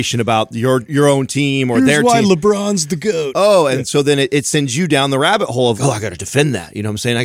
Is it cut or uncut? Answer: cut